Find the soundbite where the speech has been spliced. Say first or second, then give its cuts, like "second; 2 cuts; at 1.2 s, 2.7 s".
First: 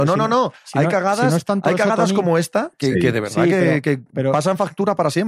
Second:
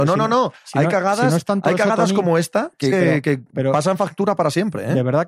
second; 1 cut; at 2.9 s